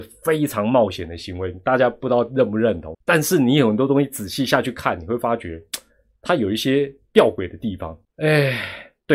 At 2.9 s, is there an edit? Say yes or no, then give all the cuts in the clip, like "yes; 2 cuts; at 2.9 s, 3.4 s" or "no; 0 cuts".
yes; 2 cuts; at 2.9 s, 8.0 s